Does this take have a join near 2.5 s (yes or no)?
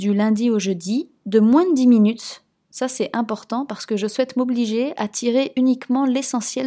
no